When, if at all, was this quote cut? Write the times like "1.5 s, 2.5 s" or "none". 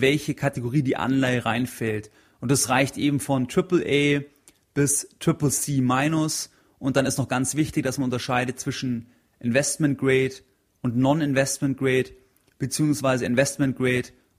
none